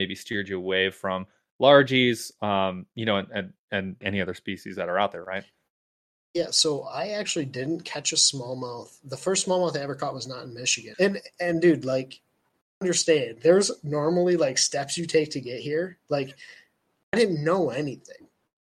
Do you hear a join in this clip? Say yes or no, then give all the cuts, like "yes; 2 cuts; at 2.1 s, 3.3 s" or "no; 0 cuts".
yes; 2 cuts; at 4.0 s, 10.9 s